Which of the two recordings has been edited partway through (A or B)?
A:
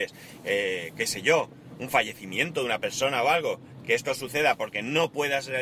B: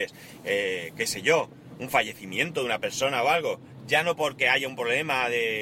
B